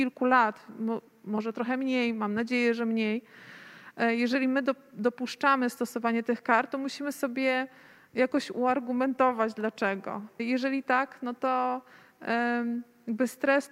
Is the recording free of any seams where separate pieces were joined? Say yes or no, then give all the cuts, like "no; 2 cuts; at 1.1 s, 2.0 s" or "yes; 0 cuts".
no; 1 cut; at 10.4 s